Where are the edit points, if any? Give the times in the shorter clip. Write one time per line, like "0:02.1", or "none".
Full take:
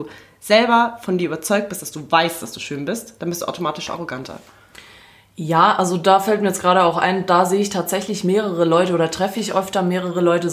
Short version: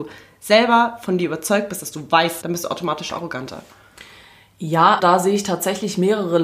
0:02.4
0:05.0